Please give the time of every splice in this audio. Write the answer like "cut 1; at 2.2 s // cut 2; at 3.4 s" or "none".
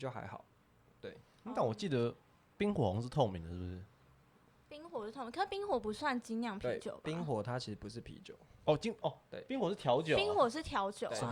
none